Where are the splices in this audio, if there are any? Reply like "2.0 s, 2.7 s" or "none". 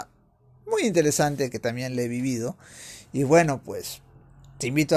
none